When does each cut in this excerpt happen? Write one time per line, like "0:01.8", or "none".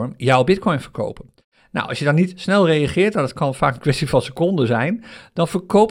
none